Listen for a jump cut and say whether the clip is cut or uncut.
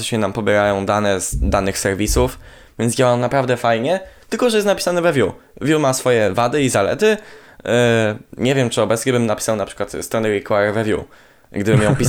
uncut